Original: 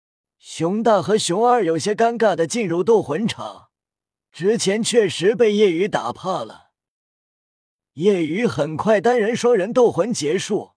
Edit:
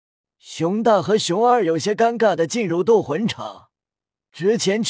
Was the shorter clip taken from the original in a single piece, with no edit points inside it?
yes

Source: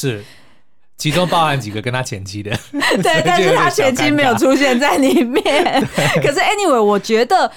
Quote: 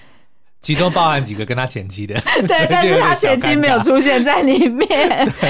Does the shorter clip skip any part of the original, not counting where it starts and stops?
yes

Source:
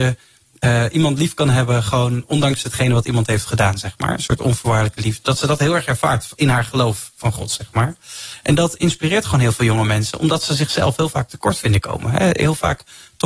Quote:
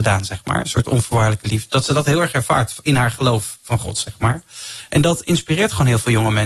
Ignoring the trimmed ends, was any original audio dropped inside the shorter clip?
no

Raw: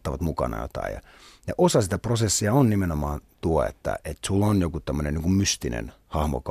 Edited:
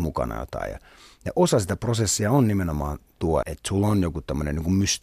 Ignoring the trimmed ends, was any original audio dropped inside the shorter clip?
yes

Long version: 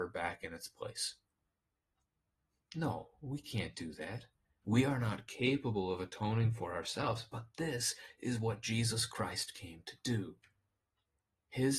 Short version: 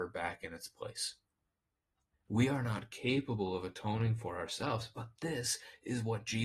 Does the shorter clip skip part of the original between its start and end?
yes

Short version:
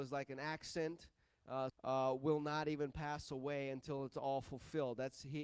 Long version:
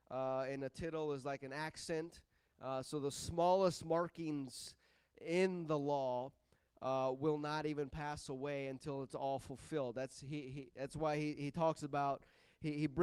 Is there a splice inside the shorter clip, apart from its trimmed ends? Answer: yes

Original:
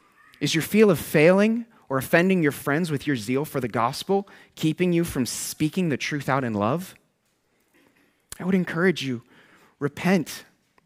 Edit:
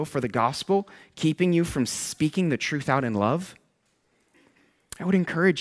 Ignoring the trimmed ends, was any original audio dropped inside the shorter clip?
no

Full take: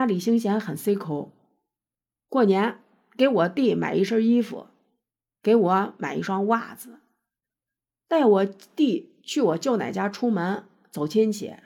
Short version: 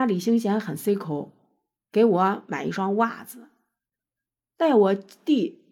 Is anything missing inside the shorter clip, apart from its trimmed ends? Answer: yes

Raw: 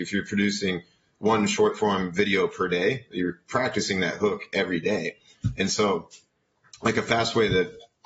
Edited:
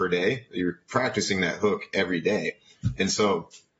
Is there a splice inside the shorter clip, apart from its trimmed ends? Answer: no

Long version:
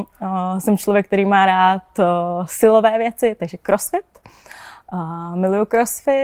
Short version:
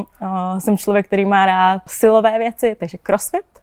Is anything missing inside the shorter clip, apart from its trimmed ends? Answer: yes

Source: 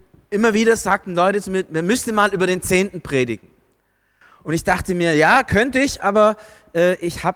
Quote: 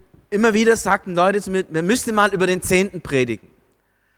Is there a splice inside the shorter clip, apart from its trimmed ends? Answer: no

